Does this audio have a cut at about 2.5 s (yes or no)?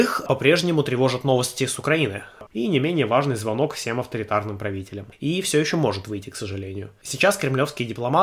yes